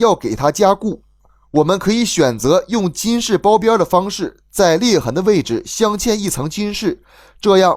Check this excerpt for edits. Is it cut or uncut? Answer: uncut